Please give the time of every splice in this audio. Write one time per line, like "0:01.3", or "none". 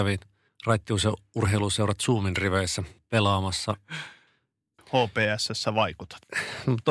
0:04.8